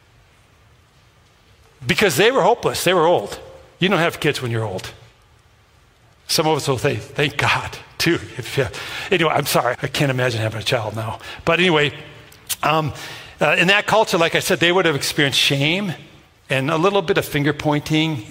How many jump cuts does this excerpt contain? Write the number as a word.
one